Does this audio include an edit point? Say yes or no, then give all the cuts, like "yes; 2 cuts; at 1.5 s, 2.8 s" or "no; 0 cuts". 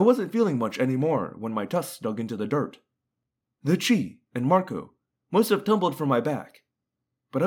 yes; 1 cut; at 4.3 s